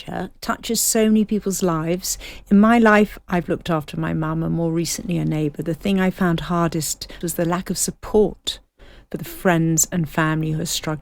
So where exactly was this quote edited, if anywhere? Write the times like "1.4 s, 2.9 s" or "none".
7.2 s

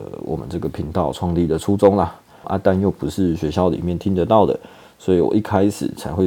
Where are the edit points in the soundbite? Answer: 2.4 s

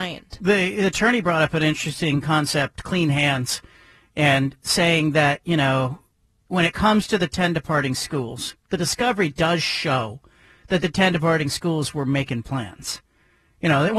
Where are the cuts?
none

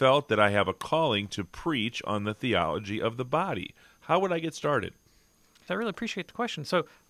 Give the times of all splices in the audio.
5.7 s

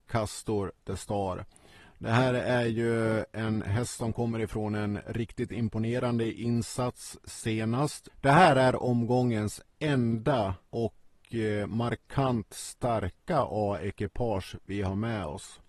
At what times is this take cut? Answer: 8.1 s, 10.6 s

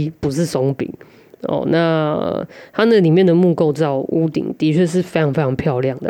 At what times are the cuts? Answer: none

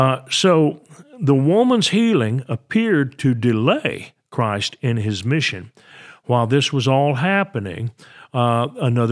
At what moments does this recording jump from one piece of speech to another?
none

